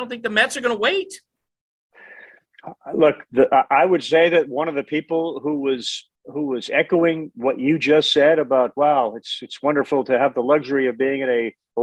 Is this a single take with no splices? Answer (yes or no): no